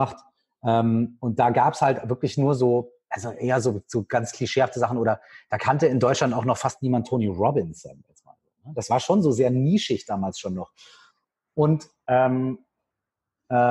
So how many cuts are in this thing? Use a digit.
0